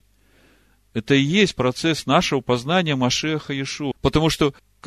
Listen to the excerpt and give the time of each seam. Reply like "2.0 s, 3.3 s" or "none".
3.9 s